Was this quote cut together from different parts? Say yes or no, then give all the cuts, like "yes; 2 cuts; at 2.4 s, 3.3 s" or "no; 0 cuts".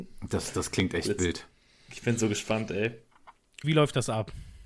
yes; 1 cut; at 3.6 s